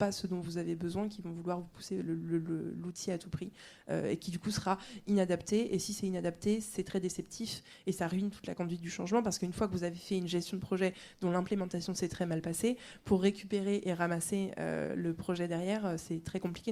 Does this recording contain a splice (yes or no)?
no